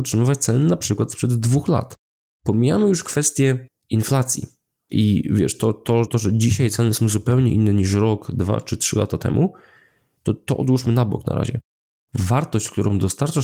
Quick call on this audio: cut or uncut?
cut